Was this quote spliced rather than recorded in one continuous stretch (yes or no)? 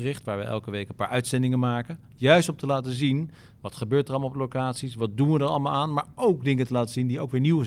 no